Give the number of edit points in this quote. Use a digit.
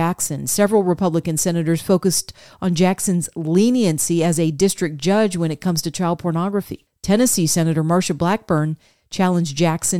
0